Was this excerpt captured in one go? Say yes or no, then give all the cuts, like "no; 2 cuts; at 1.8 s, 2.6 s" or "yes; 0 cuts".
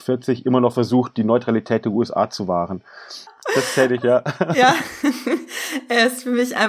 no; 1 cut; at 3.3 s